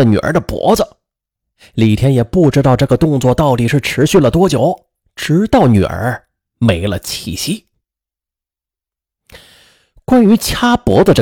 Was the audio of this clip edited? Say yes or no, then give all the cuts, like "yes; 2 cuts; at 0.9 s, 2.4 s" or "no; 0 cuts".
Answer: no; 0 cuts